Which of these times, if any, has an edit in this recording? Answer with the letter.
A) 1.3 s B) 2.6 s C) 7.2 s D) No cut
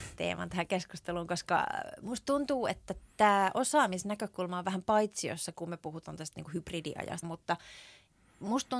C